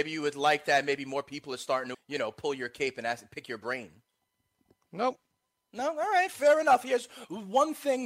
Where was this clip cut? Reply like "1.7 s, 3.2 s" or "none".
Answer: 1.9 s